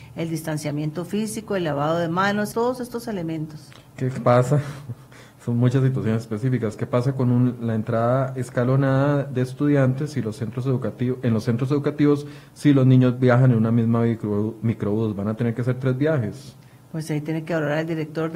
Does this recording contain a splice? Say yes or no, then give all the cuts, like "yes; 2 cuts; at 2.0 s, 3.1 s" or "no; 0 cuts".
yes; 2 cuts; at 2.5 s, 3.9 s